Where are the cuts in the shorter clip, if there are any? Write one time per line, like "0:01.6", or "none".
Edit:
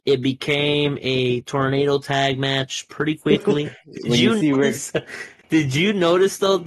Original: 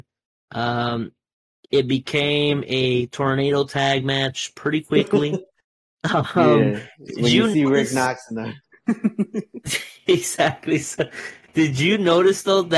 0:03.6
0:04.7